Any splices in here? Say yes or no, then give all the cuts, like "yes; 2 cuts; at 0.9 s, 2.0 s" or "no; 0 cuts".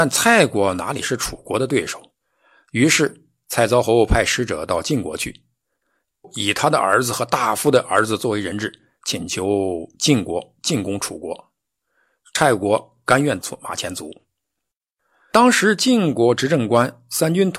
no; 0 cuts